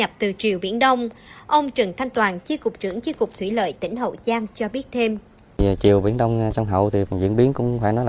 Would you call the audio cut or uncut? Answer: uncut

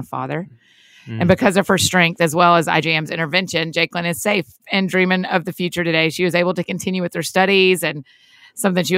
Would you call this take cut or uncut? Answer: uncut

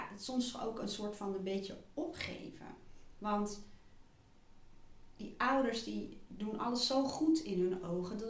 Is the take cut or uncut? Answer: uncut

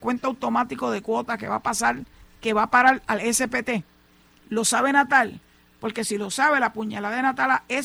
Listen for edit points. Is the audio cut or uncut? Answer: cut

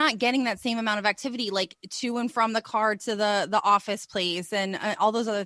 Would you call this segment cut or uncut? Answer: uncut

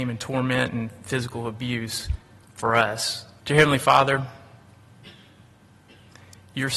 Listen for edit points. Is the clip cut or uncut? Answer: cut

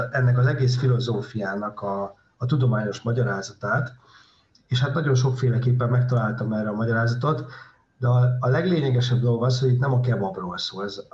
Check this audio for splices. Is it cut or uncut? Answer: uncut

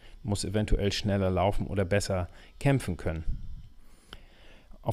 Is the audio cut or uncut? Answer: uncut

